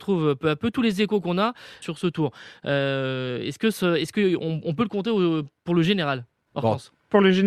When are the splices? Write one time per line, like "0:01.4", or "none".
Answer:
0:01.8